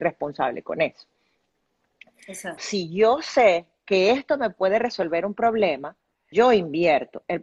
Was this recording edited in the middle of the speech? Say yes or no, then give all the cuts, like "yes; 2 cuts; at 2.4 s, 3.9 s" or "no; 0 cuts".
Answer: yes; 2 cuts; at 2.6 s, 6.3 s